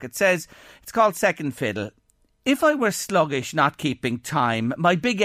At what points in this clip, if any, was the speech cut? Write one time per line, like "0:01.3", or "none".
none